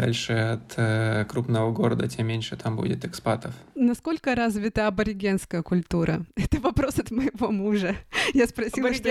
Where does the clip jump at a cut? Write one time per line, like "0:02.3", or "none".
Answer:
none